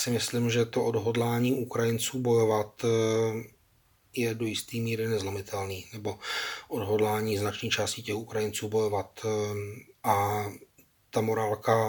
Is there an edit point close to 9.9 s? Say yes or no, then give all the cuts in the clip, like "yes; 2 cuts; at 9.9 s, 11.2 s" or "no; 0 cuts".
yes; 1 cut; at 9.9 s